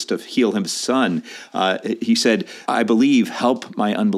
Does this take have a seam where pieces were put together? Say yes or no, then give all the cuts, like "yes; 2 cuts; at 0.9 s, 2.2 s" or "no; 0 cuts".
yes; 1 cut; at 2.7 s